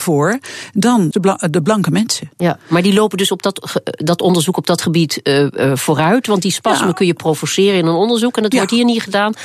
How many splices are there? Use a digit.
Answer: 1